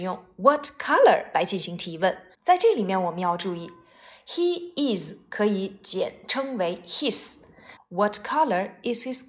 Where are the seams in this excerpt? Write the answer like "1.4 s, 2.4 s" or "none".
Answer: 2.3 s, 7.8 s